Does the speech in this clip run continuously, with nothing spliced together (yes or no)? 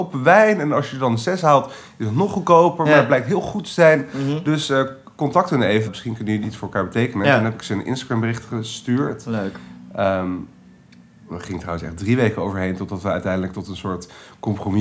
no